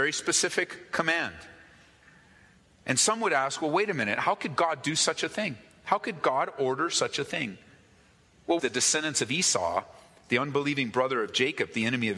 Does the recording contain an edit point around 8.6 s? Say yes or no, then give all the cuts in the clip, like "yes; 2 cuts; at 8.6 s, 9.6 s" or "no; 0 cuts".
yes; 1 cut; at 8.6 s